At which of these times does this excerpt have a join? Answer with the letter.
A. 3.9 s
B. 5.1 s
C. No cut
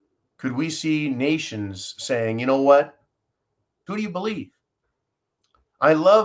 A